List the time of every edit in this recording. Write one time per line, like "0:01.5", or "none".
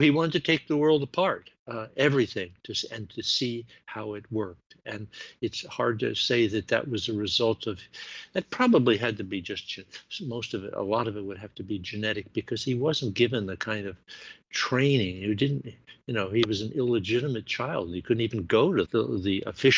0:18.8